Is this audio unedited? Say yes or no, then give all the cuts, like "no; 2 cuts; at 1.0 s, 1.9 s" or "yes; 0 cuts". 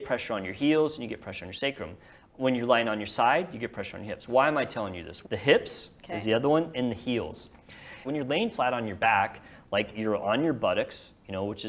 no; 2 cuts; at 5.2 s, 8.0 s